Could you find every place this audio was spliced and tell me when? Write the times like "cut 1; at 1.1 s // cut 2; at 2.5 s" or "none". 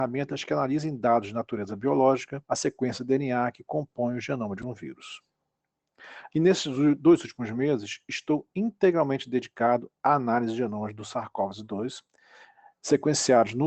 cut 1; at 2.5 s // cut 2; at 6.3 s

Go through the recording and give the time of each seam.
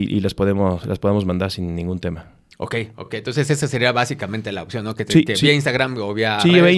none

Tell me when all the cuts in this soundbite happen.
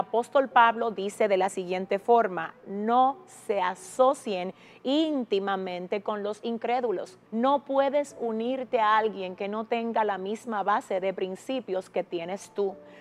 cut 1; at 7.3 s

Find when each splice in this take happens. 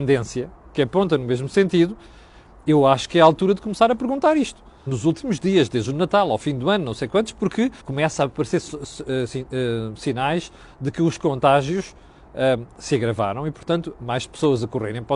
cut 1; at 4.9 s // cut 2; at 7.8 s

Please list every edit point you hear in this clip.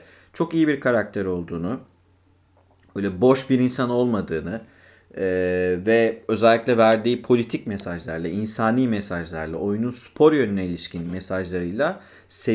none

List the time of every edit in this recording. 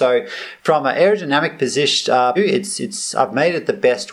cut 1; at 2.4 s

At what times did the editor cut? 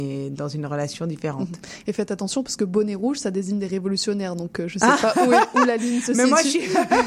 none

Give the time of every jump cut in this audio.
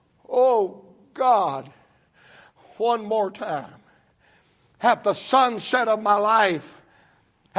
none

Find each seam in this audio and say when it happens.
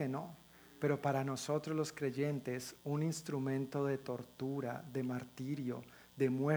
none

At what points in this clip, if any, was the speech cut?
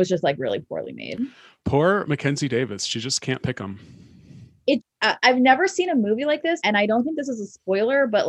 cut 1; at 4.8 s // cut 2; at 6.6 s

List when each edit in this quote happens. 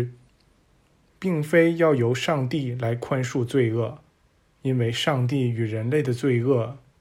cut 1; at 1.1 s

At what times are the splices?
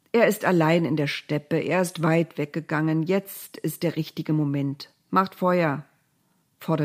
none

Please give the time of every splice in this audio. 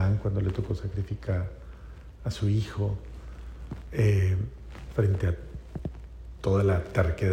cut 1; at 4.9 s

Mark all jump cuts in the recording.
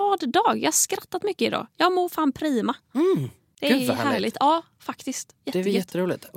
none

